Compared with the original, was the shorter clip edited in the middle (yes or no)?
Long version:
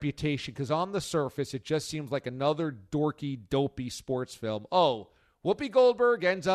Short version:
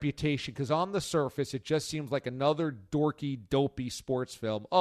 no